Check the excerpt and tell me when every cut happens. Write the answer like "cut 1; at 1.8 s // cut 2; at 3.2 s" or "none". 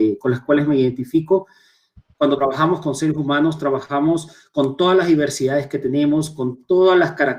cut 1; at 2.1 s

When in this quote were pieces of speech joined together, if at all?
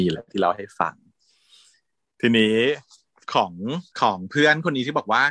cut 1; at 3.9 s

